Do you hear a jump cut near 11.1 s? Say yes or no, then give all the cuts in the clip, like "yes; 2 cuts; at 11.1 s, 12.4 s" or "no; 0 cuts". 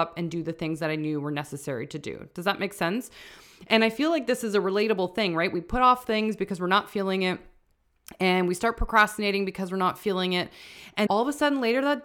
yes; 1 cut; at 11.1 s